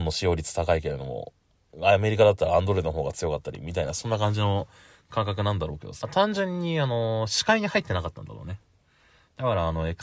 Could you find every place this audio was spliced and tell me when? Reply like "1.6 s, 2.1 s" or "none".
6.0 s